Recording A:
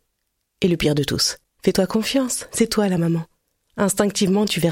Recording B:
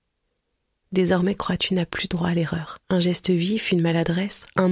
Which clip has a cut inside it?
B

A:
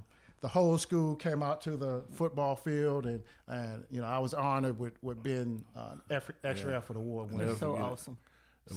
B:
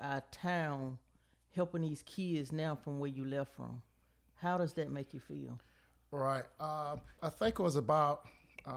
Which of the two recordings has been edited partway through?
B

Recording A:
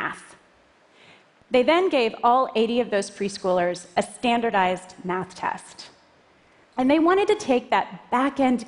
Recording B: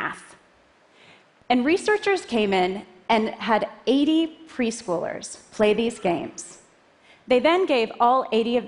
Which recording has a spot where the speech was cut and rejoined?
A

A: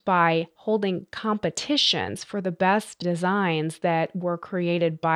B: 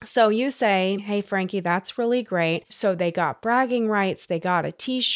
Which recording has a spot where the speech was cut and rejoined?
B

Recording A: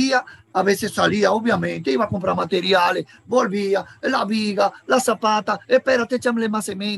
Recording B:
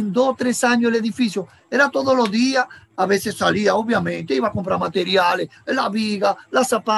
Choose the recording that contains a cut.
B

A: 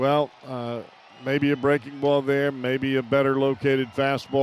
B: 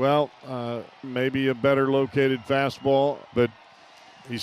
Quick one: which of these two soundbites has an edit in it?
B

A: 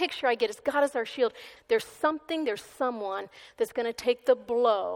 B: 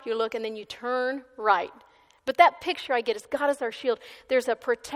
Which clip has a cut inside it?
A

